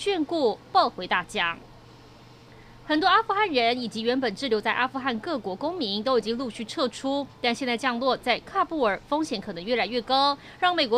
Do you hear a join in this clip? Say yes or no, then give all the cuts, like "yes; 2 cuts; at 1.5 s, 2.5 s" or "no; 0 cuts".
no; 0 cuts